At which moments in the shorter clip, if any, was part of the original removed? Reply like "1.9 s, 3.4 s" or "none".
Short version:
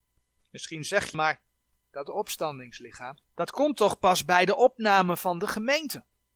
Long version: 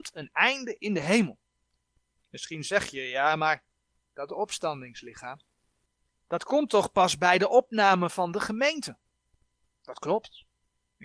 1.1 s, 3.2 s